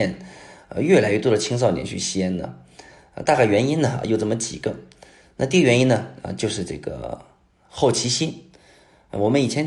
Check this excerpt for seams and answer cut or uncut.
uncut